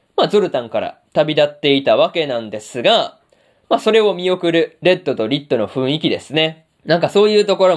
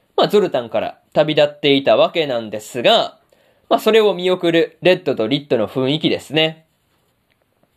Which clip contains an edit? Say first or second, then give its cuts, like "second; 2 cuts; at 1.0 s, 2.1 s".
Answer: first; 1 cut; at 6.7 s